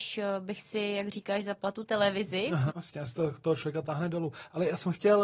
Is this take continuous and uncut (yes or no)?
no